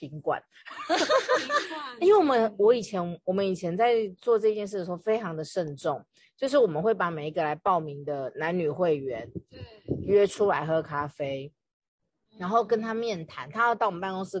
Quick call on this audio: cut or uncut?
uncut